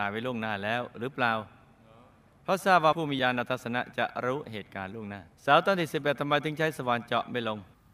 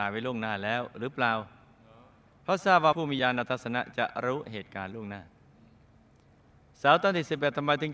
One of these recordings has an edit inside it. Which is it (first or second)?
first